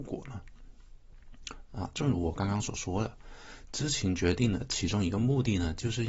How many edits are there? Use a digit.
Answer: 0